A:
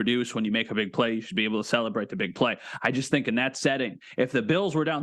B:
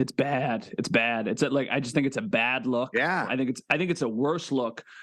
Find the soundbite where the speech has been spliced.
B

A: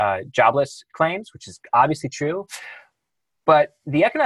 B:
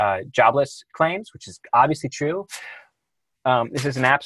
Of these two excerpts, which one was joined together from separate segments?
B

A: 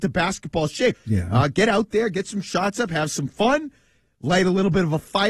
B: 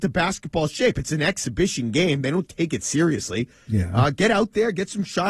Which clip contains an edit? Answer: A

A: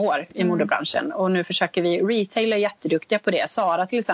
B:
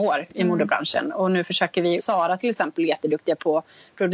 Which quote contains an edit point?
B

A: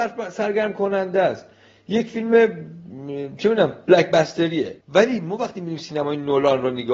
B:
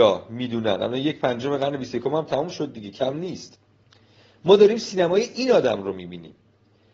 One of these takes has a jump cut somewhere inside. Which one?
A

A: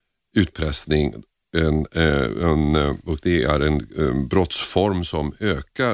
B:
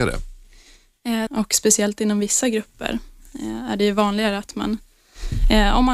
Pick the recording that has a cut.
B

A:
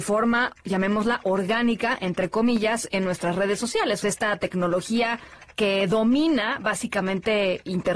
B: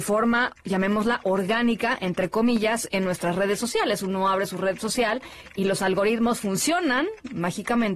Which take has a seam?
A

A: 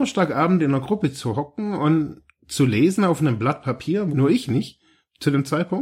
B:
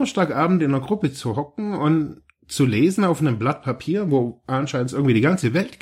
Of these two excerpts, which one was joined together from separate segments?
A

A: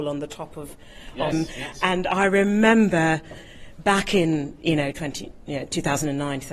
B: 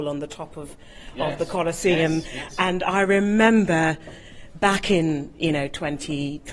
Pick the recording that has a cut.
A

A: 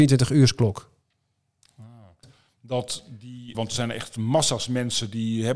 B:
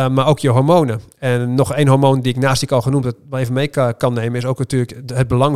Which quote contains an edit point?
A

